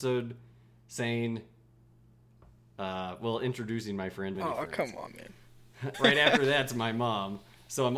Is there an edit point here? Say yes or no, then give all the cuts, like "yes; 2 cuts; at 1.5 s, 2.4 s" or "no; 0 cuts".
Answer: yes; 2 cuts; at 4.3 s, 5.9 s